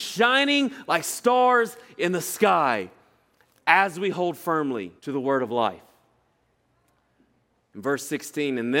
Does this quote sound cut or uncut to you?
cut